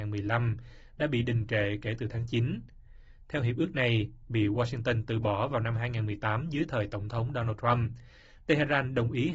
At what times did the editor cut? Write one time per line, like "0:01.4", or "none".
none